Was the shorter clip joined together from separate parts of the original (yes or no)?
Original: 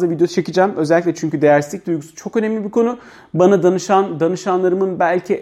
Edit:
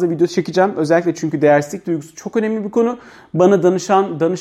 no